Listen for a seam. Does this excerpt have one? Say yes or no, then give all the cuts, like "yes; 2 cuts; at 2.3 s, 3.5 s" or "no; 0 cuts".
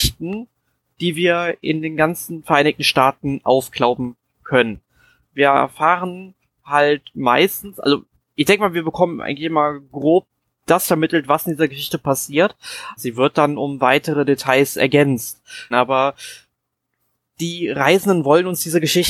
yes; 3 cuts; at 5.2 s, 13.0 s, 15.7 s